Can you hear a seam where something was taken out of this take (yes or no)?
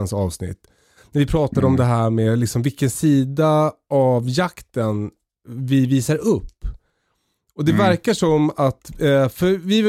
no